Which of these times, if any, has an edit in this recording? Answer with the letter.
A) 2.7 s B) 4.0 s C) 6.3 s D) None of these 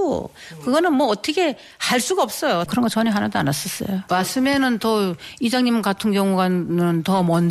A